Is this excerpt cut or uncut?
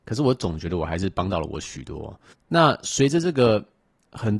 cut